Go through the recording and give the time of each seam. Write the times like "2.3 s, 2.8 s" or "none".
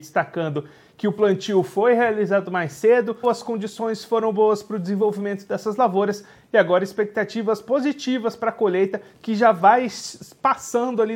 3.2 s